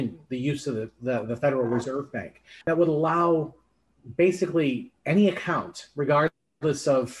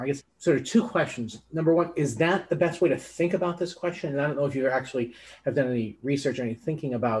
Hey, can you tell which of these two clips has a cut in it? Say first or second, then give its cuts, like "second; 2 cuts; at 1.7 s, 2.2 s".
first; 1 cut; at 2.6 s